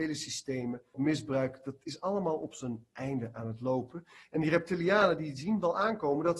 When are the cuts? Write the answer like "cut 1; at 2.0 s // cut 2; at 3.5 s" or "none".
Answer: cut 1; at 0.9 s